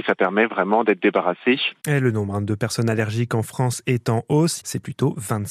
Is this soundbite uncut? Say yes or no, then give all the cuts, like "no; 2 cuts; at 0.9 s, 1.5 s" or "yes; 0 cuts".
no; 2 cuts; at 1.8 s, 4.6 s